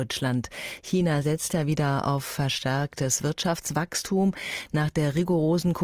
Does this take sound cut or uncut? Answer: uncut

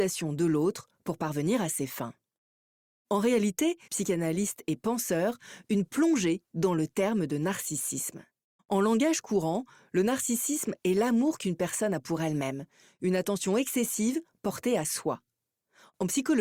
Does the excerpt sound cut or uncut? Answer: cut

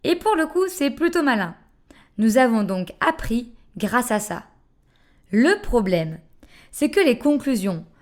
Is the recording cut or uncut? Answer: uncut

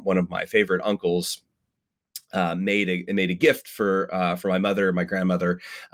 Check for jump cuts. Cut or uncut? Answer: uncut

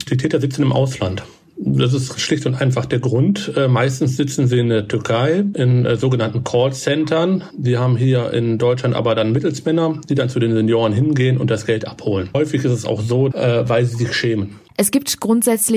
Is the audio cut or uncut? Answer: cut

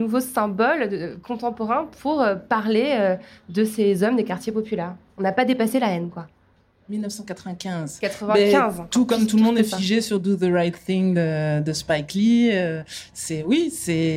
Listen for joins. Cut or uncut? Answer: uncut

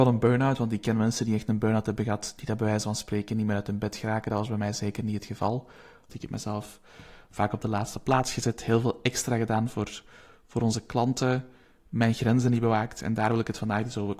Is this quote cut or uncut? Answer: cut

